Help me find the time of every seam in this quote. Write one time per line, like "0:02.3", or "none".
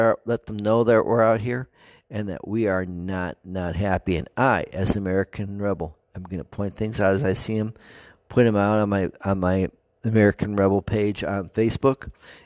none